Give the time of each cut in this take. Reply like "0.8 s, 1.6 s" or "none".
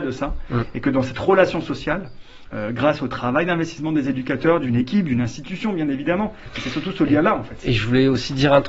none

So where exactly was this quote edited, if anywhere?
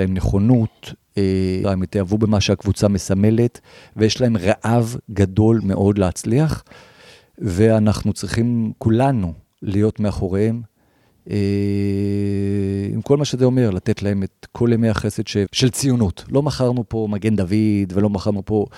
1.6 s, 15.5 s

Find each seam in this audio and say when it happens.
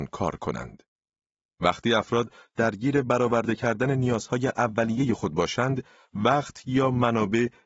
none

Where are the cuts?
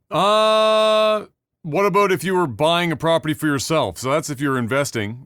none

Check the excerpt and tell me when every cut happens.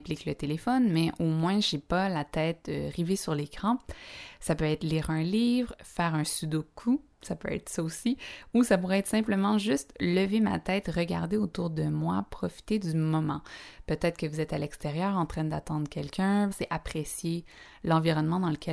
16.5 s

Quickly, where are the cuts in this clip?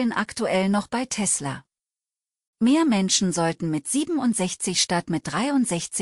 2.5 s

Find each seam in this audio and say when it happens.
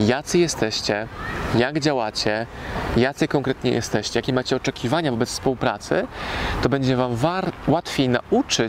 none

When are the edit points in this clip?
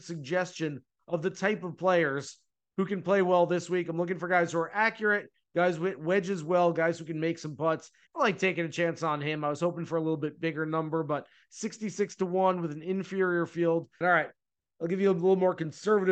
8.1 s, 14.0 s

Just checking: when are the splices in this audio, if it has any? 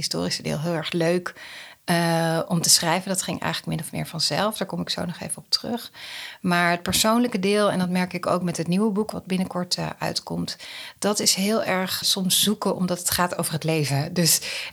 12.0 s

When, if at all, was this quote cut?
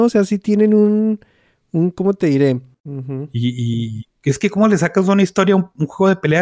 2.7 s, 4.1 s

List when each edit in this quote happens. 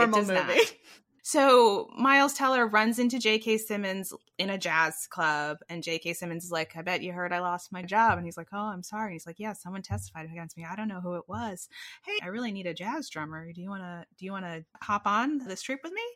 1.2 s, 12.2 s

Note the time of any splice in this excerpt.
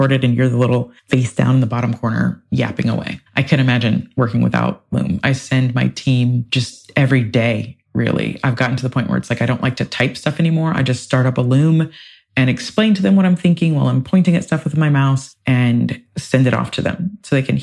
1.0 s

